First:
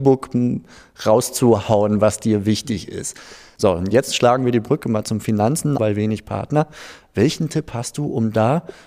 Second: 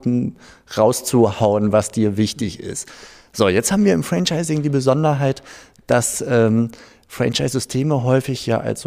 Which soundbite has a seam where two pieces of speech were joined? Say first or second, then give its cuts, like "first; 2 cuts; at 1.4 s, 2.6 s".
first; 2 cuts; at 3.6 s, 5.8 s